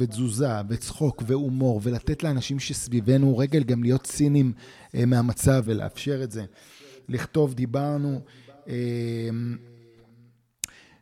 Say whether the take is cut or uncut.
cut